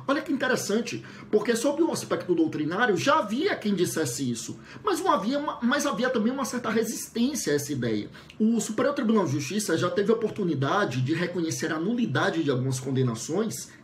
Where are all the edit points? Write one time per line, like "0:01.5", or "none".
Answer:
0:08.4